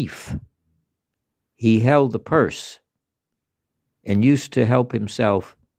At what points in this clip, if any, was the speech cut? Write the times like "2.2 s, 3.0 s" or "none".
none